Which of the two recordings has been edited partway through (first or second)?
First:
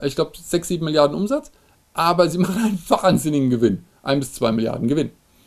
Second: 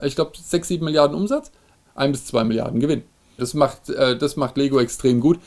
second